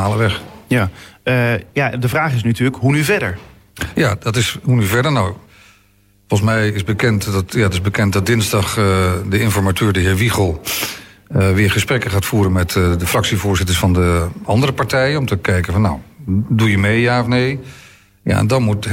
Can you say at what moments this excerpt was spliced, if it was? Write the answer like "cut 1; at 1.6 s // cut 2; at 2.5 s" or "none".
none